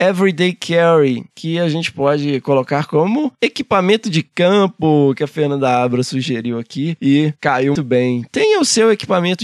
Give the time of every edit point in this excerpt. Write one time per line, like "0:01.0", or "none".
0:07.8

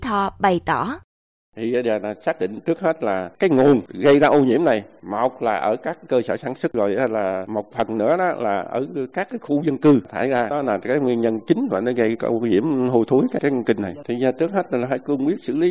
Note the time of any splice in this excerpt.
0:13.4

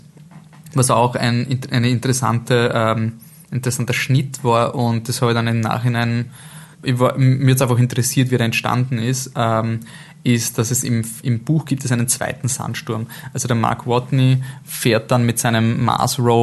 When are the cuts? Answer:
0:06.7

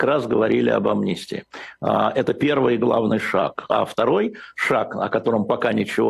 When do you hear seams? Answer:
none

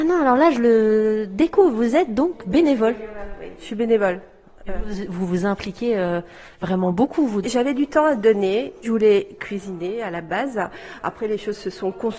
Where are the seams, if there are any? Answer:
0:07.4
0:08.8

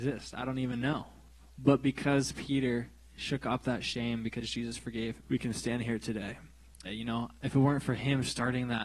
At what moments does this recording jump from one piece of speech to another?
0:05.2
0:06.8

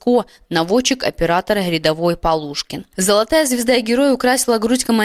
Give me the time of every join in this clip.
0:02.9

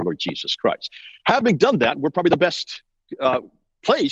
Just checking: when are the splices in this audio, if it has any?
none

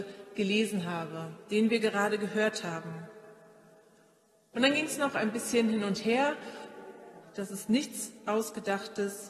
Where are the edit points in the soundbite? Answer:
0:04.5
0:07.2

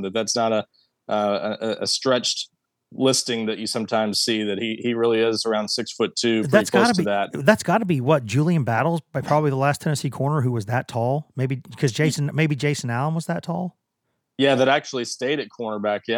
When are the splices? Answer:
none

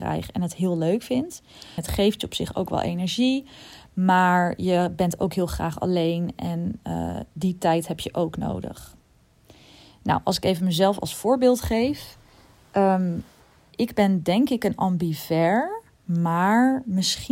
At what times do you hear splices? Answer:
0:01.8

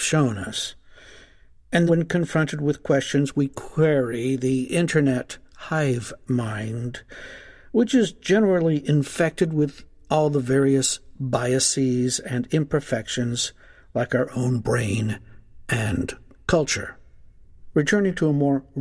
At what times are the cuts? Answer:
0:01.9
0:17.7

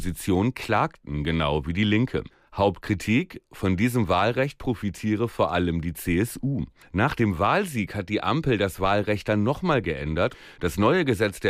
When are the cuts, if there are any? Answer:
0:10.6

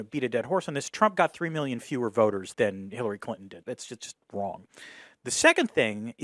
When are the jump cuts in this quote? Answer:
0:02.5
0:03.6

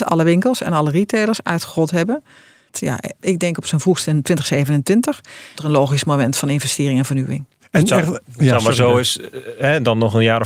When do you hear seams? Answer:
0:02.7
0:05.6

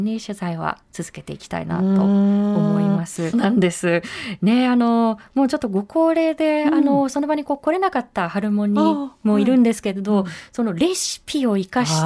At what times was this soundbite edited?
0:03.3

